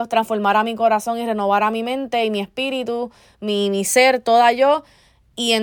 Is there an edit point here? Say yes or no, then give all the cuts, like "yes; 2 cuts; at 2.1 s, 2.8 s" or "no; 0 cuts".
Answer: no; 0 cuts